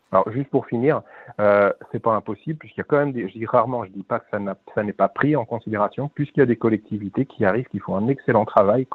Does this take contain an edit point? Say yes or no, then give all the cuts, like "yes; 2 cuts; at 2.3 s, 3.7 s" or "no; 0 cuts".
no; 0 cuts